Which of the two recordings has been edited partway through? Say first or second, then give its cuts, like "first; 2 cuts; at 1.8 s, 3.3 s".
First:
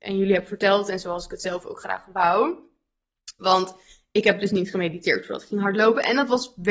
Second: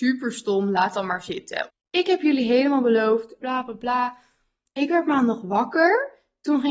second; 2 cuts; at 1.7 s, 3.4 s